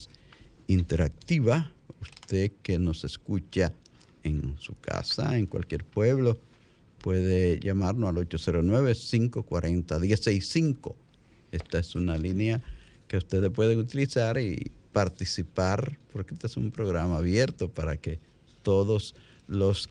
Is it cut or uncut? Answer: uncut